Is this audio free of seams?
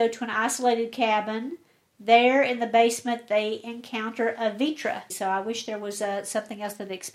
no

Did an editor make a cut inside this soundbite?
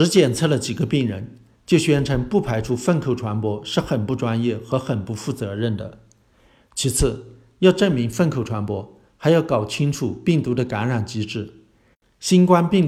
no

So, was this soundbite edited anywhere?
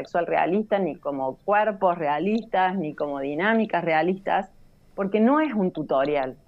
no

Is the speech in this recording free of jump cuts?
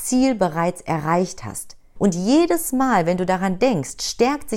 no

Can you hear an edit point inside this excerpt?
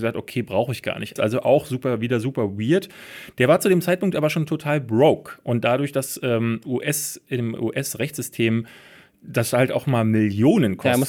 yes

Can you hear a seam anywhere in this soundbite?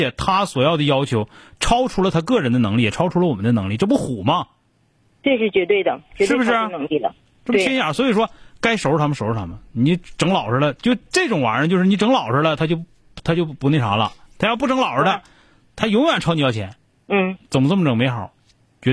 yes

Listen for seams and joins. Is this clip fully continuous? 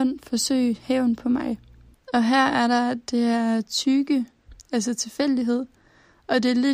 no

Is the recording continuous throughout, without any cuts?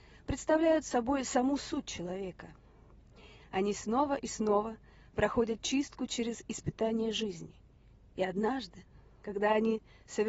yes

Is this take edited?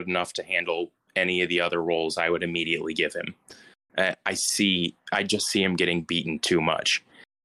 no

